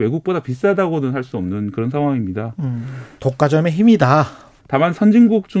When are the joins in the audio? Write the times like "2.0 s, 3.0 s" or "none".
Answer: 3.2 s, 4.6 s